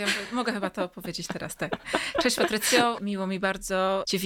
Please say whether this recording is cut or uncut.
uncut